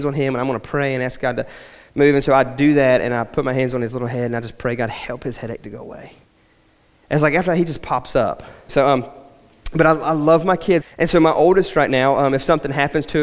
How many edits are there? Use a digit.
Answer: 2